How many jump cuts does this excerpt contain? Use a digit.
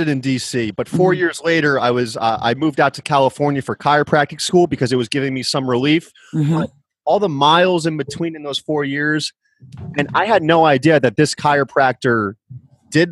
0